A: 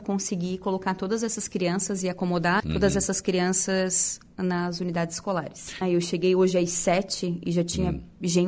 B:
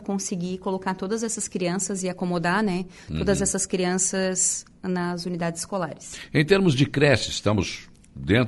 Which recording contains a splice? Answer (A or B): A